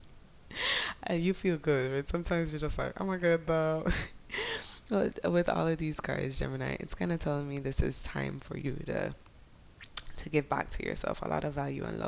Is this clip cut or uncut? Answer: uncut